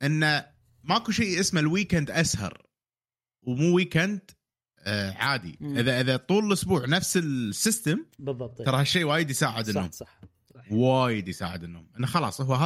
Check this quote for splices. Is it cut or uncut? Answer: uncut